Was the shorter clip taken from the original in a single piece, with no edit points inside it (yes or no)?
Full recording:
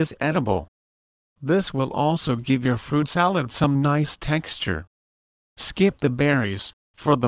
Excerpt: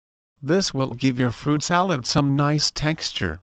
no